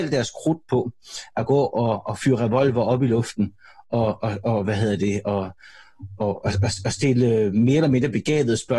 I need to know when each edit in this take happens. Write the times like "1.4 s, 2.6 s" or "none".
none